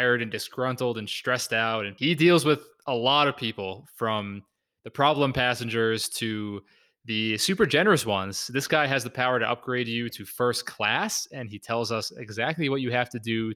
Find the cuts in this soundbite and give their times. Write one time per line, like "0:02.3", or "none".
none